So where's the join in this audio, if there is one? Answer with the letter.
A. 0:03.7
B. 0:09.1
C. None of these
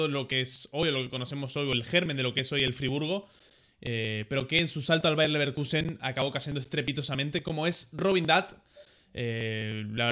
C